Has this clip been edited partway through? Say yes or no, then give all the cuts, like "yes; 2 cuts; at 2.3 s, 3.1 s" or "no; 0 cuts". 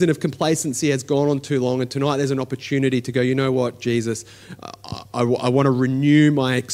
no; 0 cuts